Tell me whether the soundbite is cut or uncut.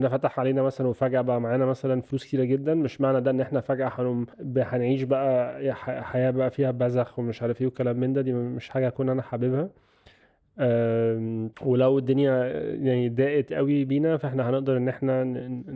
cut